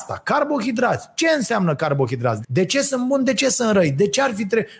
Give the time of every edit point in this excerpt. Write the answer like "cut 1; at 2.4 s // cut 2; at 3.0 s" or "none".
cut 1; at 2.4 s